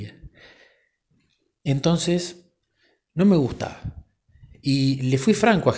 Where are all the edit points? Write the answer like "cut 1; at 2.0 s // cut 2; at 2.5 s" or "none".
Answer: none